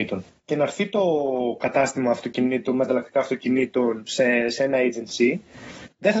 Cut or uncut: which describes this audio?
uncut